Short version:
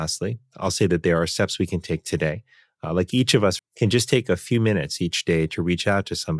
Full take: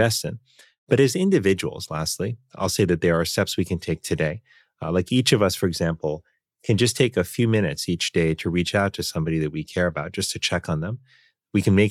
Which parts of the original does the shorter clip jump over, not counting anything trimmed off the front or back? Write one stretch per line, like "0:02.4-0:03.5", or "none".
0:05.6-0:06.5